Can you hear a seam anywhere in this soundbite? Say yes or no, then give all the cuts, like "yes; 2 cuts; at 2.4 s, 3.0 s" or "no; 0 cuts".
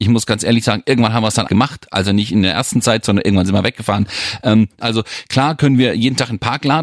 yes; 2 cuts; at 1.5 s, 4.8 s